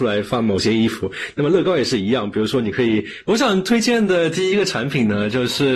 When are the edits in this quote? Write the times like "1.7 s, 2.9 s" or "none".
3.2 s

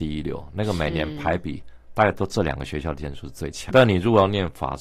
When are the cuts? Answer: 3.7 s

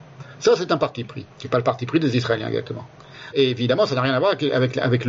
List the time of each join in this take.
1.3 s, 3.3 s

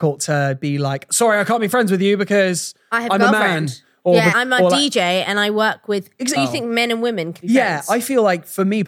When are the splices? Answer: 4.3 s, 6.4 s, 7.4 s

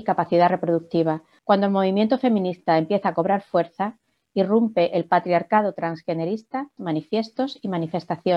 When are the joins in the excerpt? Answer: 1.4 s, 6.8 s

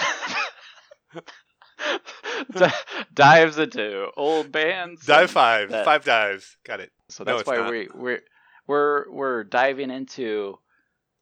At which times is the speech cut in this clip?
7.1 s

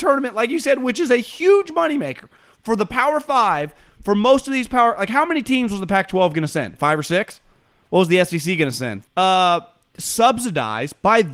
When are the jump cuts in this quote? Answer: 9.0 s

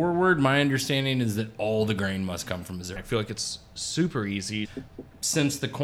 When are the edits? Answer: 3.0 s, 4.6 s

